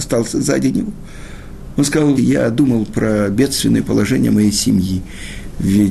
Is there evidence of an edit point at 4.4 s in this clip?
no; 1 cut; at 2.2 s

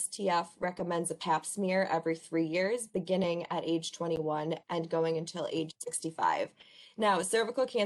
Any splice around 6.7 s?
no; 0 cuts

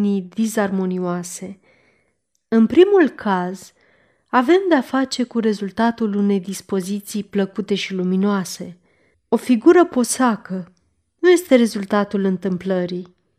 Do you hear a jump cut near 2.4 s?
no; 1 cut; at 9.1 s

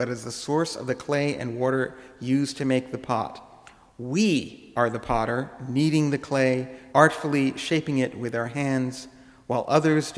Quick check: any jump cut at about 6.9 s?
yes; 1 cut; at 6.9 s

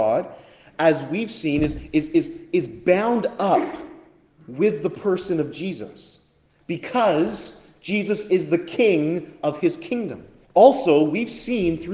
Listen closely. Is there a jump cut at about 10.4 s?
yes; 1 cut; at 10.4 s

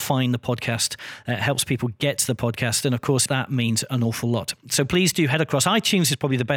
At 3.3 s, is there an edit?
yes; 1 cut; at 3.3 s

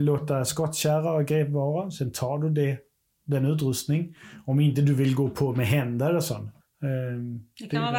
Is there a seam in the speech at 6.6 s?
yes; 1 cut; at 6.6 s

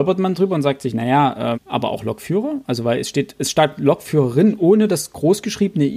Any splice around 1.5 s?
yes; 1 cut; at 1.5 s

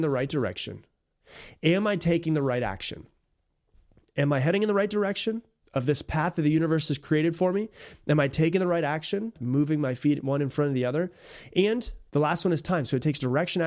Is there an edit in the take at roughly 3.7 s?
no; 2 cuts; at 9.3 s, 12.1 s

